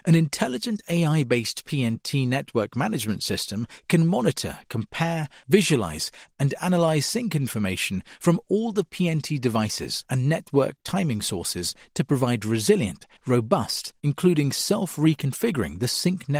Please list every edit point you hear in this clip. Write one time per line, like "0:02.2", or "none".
0:05.4
0:14.0